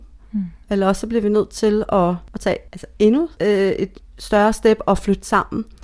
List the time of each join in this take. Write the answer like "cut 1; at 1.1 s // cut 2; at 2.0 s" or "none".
none